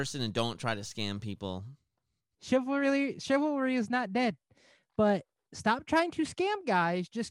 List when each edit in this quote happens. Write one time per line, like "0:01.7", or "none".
0:02.3

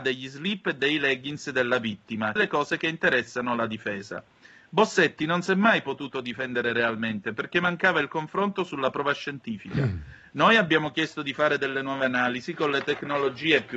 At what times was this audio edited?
0:02.4

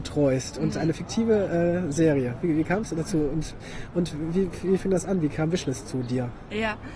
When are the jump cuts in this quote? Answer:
none

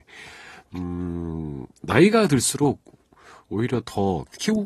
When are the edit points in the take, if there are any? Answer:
none

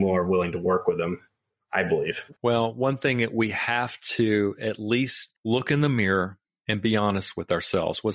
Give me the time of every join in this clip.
0:02.4
0:05.4

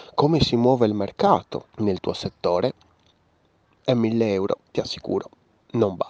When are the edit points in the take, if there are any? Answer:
0:01.7

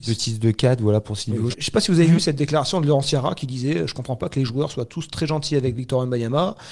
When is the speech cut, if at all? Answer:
0:01.5

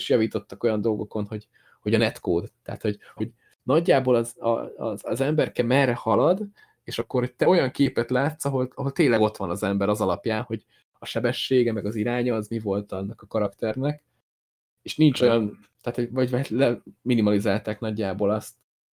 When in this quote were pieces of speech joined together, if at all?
0:03.2

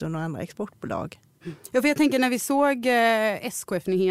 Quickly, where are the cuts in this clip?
none

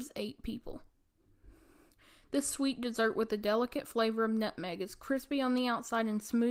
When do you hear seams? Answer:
none

